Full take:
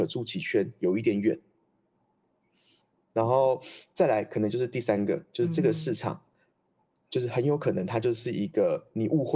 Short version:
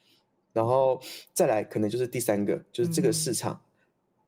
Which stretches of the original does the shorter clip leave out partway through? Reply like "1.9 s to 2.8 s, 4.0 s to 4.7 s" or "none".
none